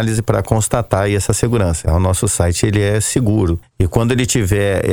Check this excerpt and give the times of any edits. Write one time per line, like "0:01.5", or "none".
0:01.8
0:03.7